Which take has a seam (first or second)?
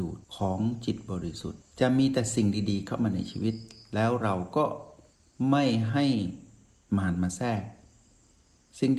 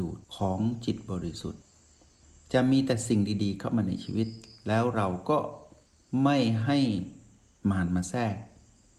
first